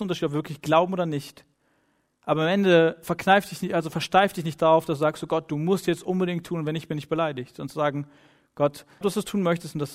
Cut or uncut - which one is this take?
cut